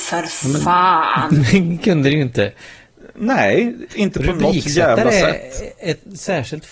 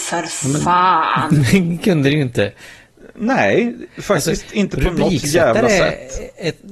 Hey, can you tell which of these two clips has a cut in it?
first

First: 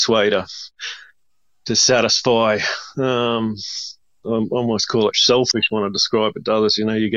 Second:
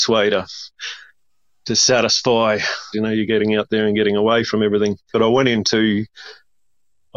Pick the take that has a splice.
second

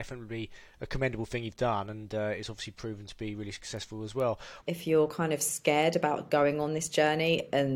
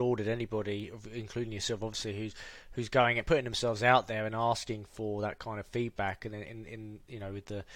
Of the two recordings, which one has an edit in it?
first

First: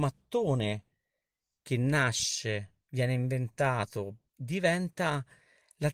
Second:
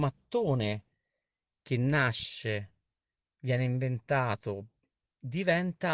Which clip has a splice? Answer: first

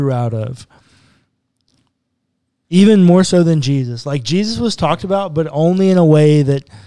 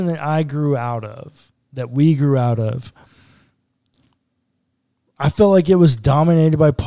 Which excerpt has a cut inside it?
first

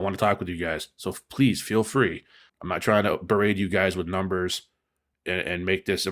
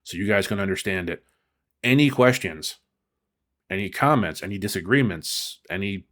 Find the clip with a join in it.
first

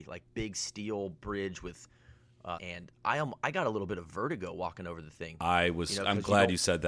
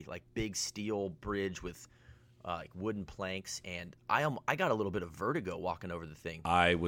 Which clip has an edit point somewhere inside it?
first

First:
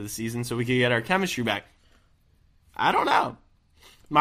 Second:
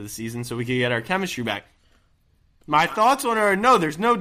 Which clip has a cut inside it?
second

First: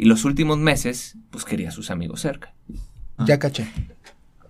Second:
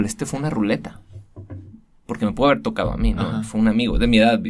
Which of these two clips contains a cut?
first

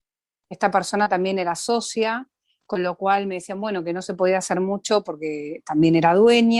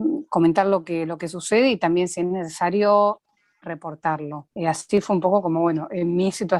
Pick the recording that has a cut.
second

